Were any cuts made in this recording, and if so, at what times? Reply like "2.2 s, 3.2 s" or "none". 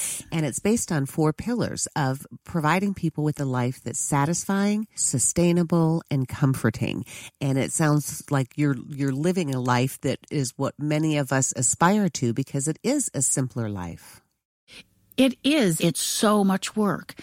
5.0 s, 15.8 s